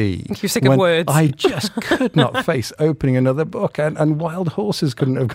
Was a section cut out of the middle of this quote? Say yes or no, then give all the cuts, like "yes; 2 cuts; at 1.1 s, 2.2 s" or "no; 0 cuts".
no; 0 cuts